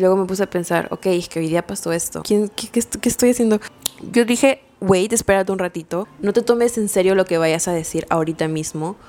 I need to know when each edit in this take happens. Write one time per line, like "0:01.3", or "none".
0:02.2